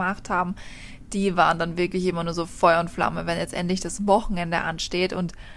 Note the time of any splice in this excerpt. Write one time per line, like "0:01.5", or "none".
none